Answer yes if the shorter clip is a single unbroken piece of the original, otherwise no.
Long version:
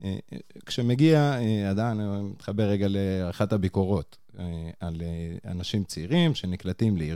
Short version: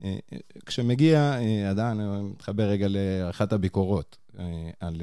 yes